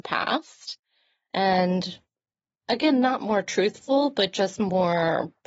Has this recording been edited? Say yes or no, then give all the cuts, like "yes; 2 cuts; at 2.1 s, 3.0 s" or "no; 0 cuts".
no; 0 cuts